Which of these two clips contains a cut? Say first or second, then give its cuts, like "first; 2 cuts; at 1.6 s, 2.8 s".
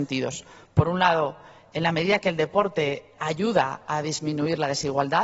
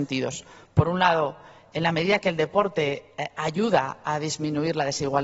first; 1 cut; at 3.1 s